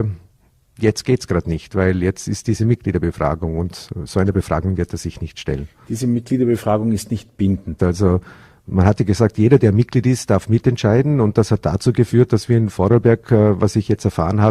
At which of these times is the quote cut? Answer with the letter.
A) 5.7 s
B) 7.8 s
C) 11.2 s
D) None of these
B